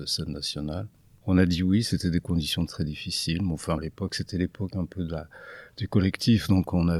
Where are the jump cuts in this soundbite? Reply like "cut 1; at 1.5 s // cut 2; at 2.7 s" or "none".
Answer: cut 1; at 2.7 s // cut 2; at 3.8 s